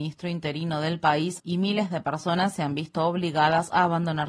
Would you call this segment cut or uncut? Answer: cut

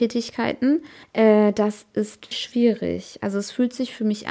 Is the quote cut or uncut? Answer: cut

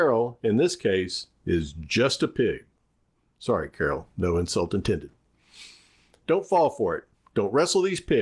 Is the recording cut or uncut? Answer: uncut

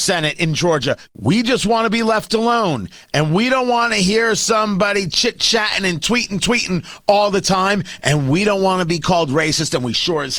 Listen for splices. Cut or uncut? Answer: cut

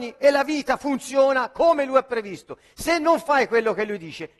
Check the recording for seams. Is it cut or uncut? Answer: uncut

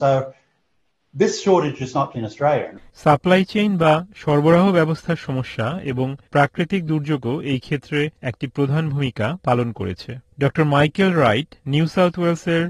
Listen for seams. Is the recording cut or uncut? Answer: cut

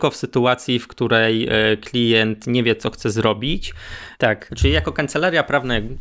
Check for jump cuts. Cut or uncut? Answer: cut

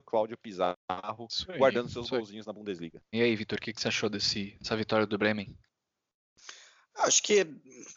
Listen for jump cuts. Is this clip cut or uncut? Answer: cut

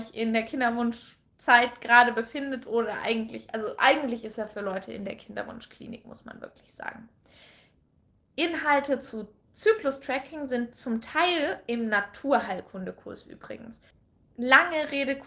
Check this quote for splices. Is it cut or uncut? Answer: uncut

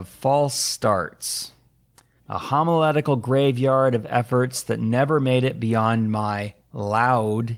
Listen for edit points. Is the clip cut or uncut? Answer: cut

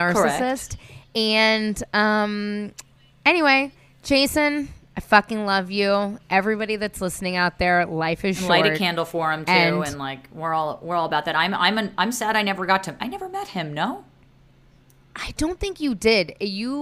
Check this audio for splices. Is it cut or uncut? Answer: uncut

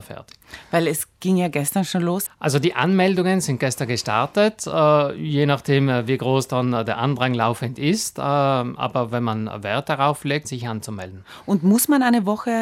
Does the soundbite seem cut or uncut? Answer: cut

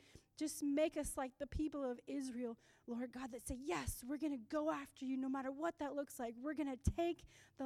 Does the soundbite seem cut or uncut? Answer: uncut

